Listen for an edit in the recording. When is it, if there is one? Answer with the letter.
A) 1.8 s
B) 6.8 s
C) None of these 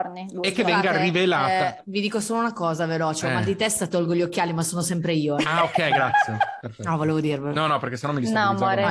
C